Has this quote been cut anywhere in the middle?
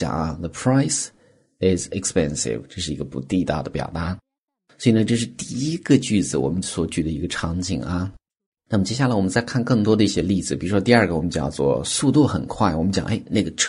no; 0 cuts

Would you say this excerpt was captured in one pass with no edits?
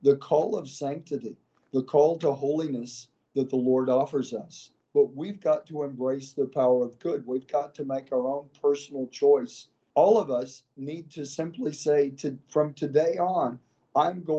no; 2 cuts; at 4.8 s, 9.9 s

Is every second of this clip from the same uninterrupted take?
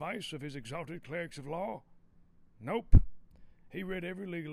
yes; 0 cuts

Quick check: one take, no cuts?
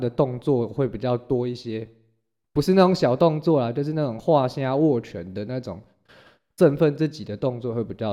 yes; 0 cuts

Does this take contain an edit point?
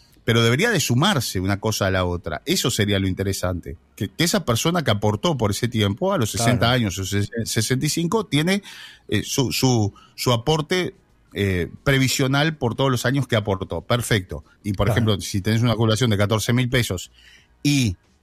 yes; 1 cut; at 14.6 s

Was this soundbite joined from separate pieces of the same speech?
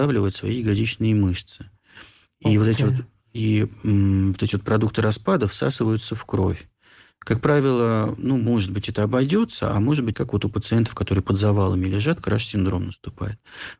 yes; 1 cut; at 10.1 s

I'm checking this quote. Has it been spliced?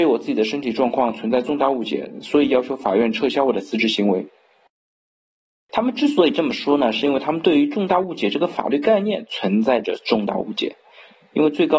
no; 0 cuts

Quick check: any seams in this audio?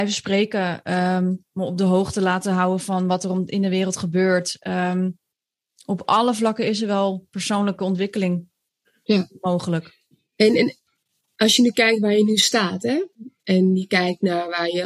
no; 0 cuts

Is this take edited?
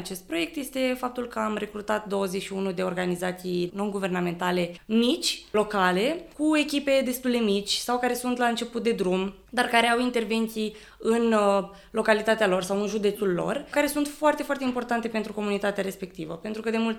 no; 0 cuts

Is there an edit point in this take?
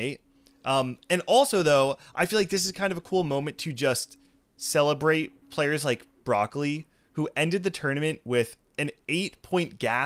yes; 1 cut; at 5.4 s

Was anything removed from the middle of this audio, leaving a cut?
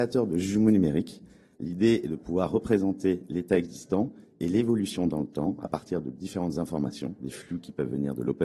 yes; 1 cut; at 1.5 s

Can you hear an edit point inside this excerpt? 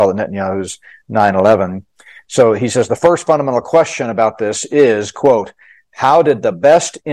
no; 0 cuts

